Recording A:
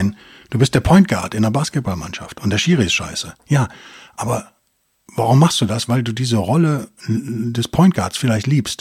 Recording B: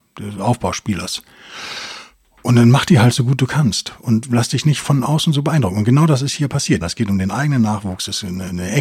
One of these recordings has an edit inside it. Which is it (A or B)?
B